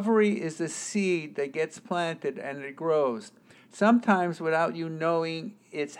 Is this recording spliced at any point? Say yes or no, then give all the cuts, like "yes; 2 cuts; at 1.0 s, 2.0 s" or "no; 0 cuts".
no; 0 cuts